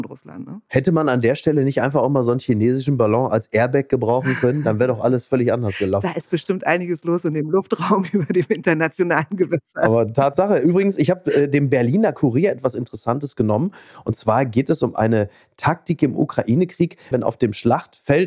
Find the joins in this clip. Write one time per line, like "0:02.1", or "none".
0:17.1

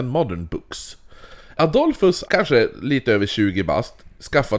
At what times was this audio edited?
0:02.3

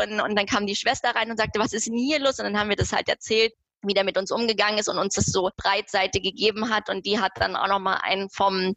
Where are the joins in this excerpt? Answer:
none

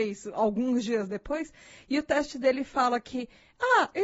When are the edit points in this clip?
none

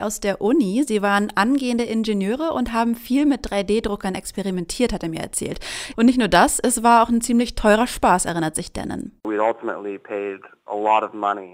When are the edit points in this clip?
0:05.9

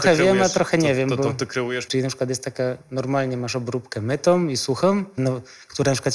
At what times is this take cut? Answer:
0:01.9
0:05.2

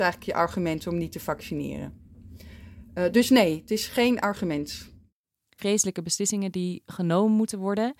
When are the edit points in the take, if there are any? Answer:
0:05.6

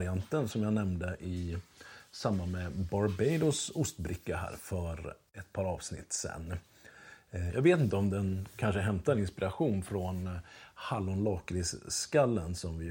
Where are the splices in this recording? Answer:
none

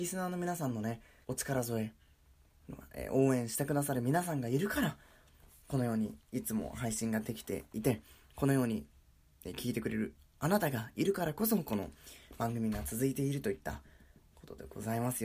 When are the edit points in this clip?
0:01.2

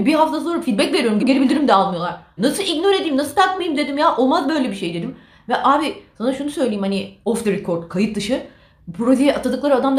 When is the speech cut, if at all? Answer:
0:01.2
0:02.4

